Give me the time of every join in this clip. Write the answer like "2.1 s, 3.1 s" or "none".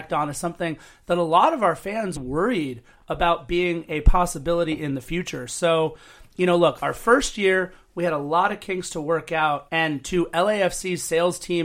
2.2 s, 9.7 s